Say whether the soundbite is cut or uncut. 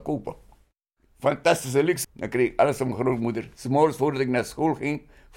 cut